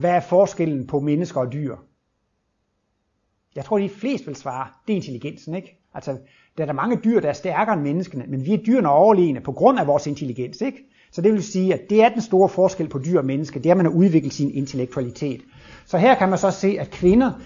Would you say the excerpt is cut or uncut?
uncut